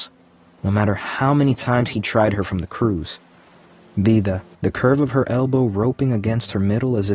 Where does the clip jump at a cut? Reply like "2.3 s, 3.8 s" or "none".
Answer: 4.5 s